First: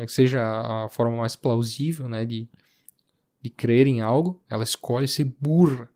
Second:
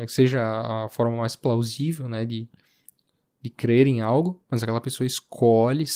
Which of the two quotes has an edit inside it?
first; 1 cut; at 4.5 s

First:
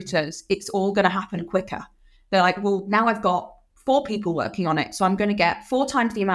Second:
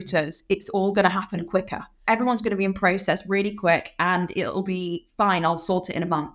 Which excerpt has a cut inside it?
second; 1 cut; at 2.1 s

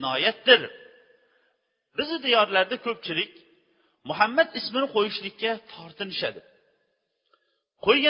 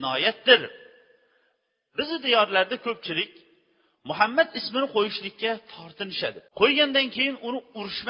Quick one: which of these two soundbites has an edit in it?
second; 1 cut; at 6.5 s

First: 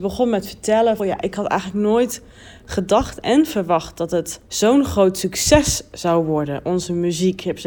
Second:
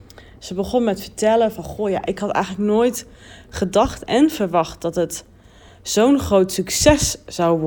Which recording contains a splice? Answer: first; 2 cuts; at 1.0 s, 4.5 s

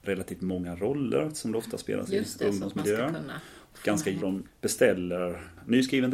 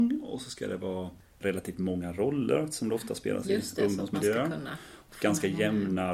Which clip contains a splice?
first; 1 cut; at 4.2 s

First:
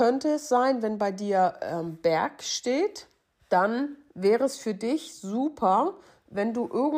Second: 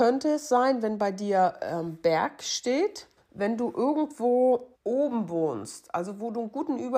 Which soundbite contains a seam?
second; 2 cuts; at 3.2 s, 4.7 s

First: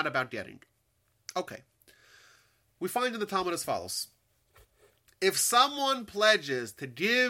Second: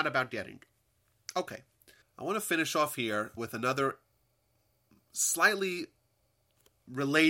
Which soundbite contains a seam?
second; 2 cuts; at 2.0 s, 3.4 s

